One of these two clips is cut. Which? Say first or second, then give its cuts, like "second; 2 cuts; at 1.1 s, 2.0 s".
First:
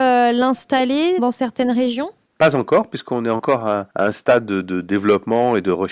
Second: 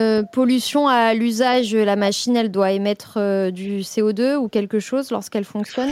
first; 1 cut; at 1.2 s